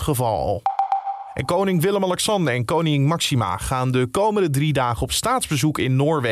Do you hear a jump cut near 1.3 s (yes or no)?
no